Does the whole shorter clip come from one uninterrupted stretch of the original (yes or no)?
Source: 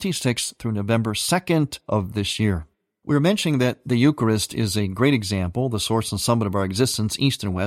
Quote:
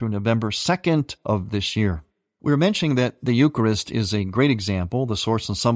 yes